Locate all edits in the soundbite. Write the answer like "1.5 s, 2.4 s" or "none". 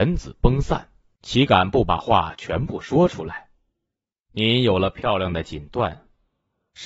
1.2 s